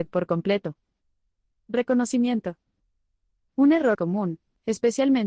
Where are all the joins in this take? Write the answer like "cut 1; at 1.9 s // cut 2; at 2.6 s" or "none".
cut 1; at 4.0 s